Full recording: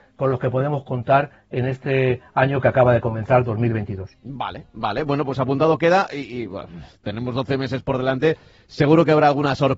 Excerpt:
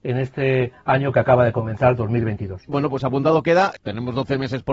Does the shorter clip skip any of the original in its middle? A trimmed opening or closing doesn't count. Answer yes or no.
yes